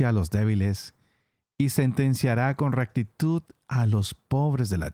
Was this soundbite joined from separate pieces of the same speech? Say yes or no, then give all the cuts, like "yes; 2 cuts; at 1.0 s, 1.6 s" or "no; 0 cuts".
no; 0 cuts